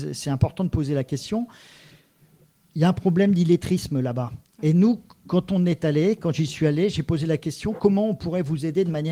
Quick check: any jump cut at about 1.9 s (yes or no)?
no